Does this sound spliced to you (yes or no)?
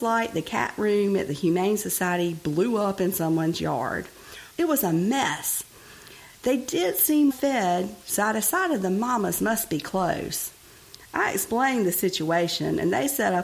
yes